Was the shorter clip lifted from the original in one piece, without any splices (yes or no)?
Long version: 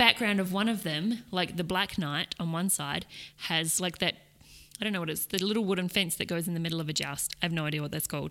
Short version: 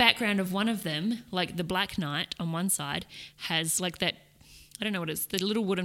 yes